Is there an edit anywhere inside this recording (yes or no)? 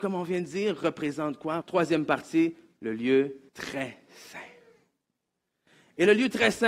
yes